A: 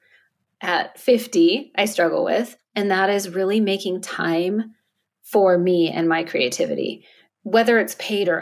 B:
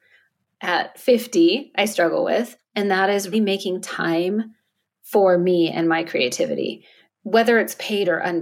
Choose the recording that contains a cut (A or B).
B